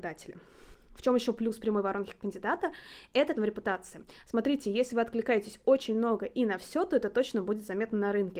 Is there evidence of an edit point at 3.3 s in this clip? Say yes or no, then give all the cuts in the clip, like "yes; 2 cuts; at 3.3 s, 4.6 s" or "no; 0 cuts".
yes; 1 cut; at 3.3 s